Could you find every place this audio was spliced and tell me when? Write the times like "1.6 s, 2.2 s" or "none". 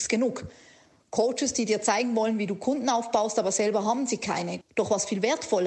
4.6 s